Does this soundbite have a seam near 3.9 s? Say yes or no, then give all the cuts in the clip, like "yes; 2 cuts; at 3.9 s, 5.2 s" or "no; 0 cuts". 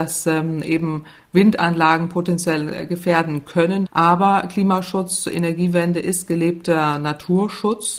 yes; 1 cut; at 3.9 s